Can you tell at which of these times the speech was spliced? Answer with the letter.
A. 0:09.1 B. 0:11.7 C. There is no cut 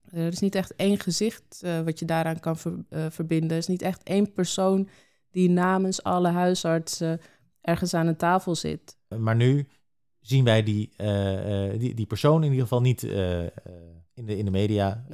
A